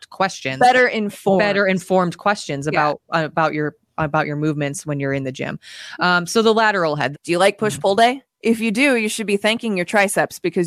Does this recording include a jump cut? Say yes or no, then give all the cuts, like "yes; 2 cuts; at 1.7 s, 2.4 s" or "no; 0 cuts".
yes; 1 cut; at 7.1 s